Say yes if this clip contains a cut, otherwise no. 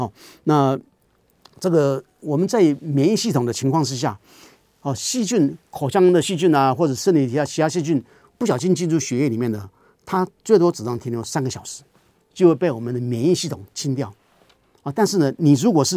no